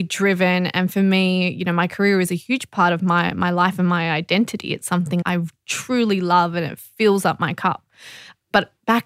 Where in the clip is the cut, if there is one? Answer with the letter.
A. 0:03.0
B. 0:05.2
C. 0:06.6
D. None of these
B